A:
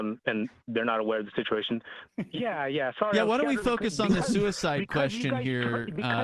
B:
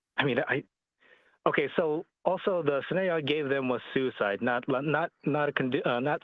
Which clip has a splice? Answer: A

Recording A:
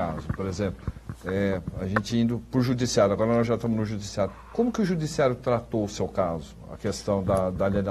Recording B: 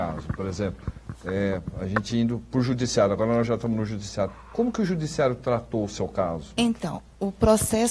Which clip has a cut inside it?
B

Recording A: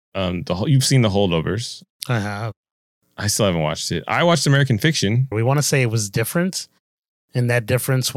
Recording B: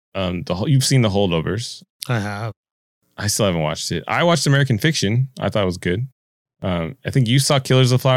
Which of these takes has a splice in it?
A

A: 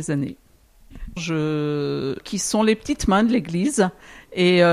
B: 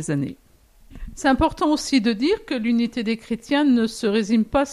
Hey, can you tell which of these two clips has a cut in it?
A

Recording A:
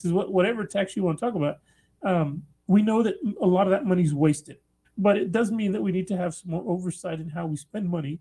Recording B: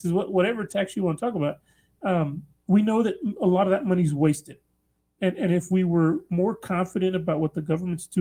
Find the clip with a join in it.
A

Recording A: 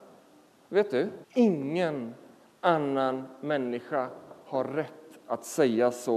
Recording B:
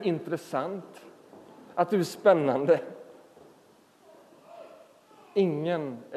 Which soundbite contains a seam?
A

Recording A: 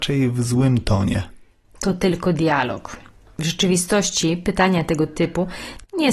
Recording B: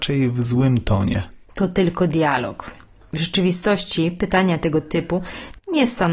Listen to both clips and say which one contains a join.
B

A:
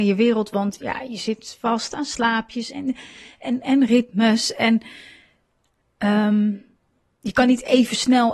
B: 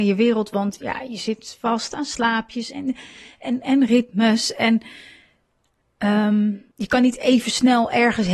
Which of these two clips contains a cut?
B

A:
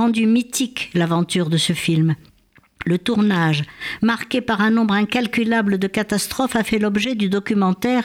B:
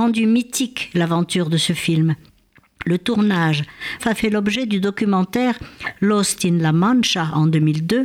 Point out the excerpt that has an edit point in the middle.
B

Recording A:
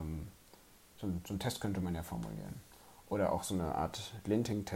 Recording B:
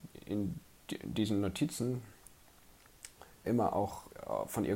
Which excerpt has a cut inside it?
B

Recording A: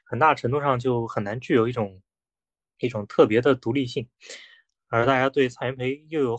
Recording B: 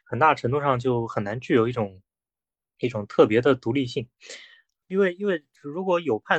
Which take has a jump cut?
B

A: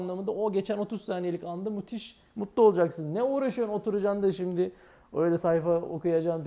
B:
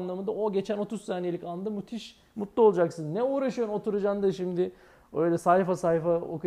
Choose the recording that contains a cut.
A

